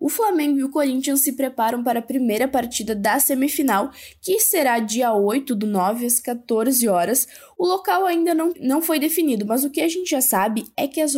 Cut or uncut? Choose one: cut